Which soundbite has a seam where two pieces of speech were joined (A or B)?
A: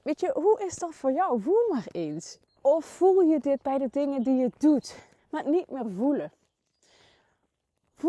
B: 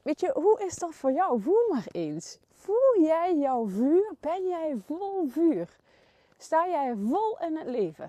A